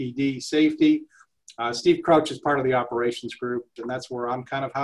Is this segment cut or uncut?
cut